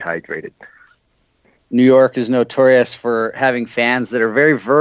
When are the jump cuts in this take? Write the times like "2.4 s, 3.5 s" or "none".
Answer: 1.7 s